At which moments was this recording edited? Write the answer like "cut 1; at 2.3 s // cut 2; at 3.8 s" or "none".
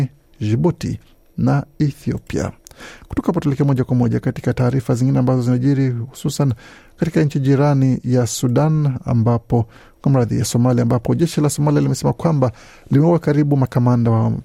none